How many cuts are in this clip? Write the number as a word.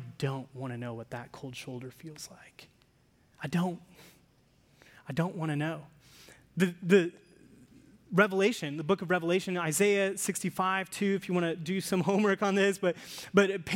zero